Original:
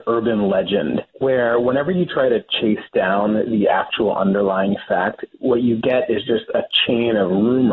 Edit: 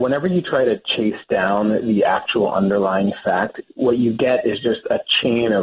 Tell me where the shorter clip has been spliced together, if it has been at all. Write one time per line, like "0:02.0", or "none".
none